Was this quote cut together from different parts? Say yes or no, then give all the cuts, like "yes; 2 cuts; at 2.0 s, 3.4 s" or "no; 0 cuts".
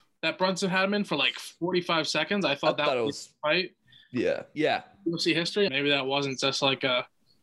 yes; 2 cuts; at 4.6 s, 5.7 s